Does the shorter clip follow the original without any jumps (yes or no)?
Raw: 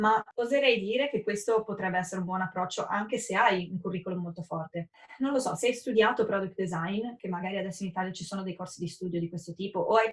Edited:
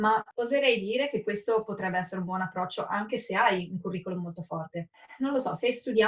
yes